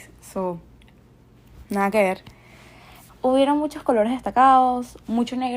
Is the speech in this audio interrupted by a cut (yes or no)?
yes